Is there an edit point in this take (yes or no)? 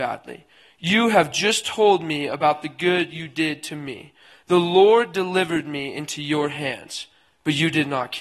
no